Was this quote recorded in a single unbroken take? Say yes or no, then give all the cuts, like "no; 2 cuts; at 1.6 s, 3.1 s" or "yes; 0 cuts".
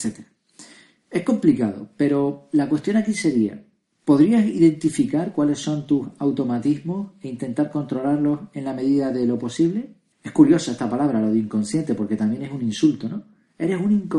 no; 1 cut; at 10.1 s